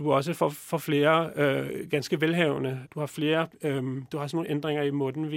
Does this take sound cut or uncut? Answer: cut